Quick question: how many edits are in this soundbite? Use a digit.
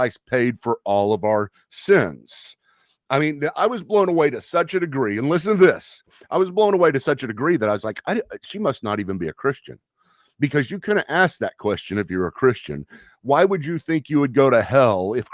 1